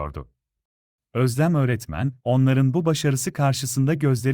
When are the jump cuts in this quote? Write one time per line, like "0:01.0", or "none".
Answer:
0:01.0